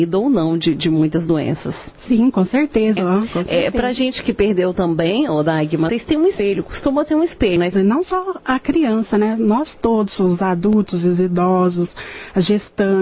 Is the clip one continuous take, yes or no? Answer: no